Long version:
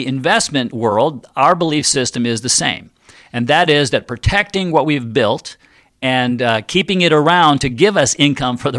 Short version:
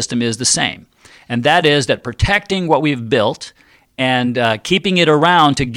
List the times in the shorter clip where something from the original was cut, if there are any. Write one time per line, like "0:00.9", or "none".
none

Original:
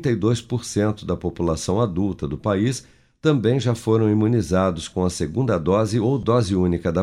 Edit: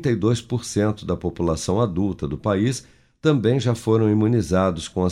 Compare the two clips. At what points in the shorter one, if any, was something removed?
none

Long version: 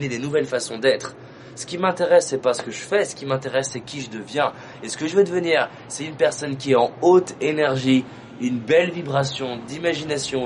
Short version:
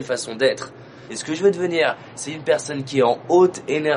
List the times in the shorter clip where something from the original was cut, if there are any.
0:01.1

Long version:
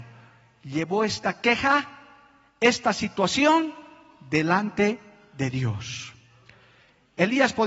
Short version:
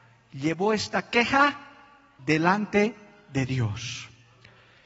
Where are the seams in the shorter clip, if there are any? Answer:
0:02.2

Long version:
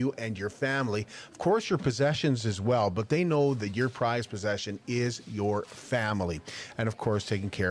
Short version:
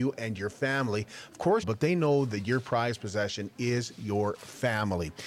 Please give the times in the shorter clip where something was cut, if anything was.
0:01.6

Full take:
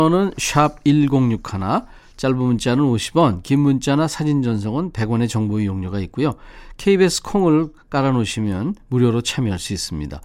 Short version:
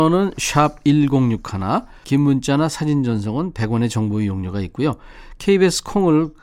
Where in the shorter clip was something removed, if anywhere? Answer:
0:02.0

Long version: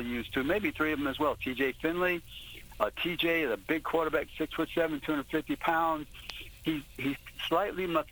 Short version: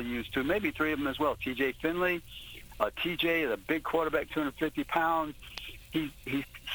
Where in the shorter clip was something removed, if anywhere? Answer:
0:04.3

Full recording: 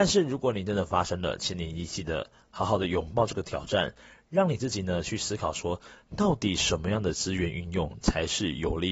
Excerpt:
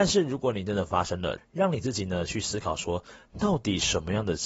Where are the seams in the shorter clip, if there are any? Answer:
0:01.4

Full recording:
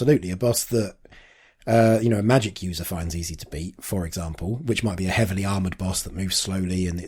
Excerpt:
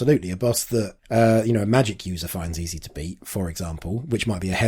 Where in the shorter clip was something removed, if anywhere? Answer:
0:01.0

